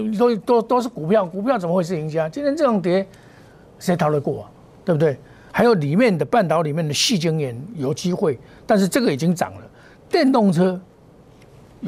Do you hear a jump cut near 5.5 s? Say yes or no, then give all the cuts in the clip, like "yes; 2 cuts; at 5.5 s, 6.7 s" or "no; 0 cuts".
yes; 1 cut; at 5.5 s